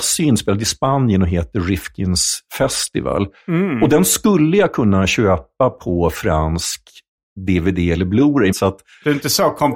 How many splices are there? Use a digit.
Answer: 1